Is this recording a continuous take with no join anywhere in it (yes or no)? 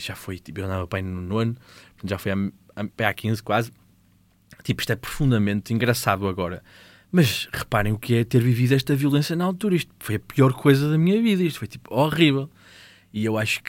yes